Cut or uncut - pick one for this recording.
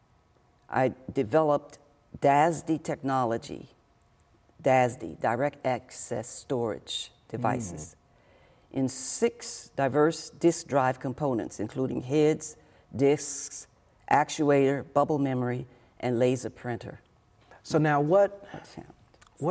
uncut